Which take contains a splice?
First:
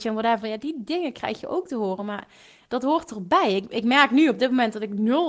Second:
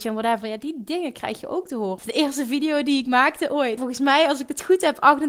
second; 2 cuts; at 2.0 s, 3.8 s

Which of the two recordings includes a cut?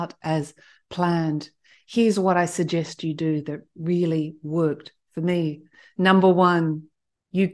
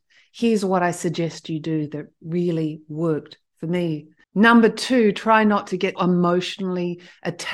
second; 2 cuts; at 4.2 s, 6.0 s

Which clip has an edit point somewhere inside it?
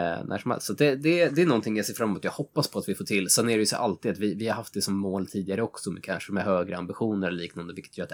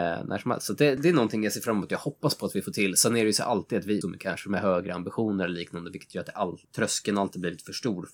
second; 3 cuts; at 1.0 s, 4.0 s, 6.6 s

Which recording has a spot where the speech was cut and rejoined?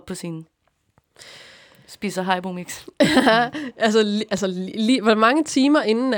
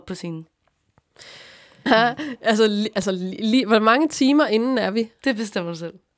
second; 1 cut; at 1.9 s

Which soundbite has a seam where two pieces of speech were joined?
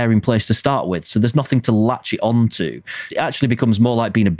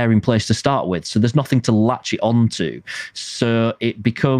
first; 1 cut; at 3.1 s

